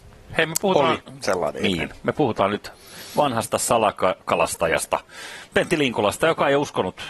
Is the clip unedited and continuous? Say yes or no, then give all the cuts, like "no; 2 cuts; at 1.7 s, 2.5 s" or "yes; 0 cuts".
yes; 0 cuts